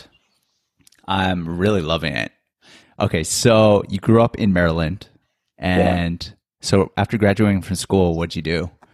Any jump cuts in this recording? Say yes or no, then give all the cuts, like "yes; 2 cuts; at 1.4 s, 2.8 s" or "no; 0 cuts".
yes; 1 cut; at 2.8 s